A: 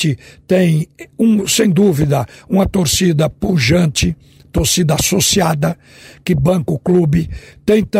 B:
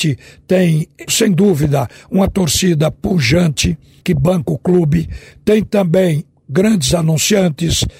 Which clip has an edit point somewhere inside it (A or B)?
B